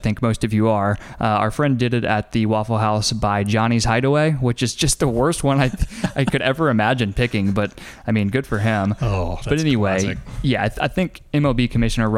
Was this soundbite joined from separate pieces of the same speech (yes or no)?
no